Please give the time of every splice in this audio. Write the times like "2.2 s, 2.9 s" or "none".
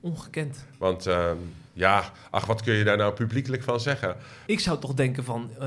1.7 s, 4.5 s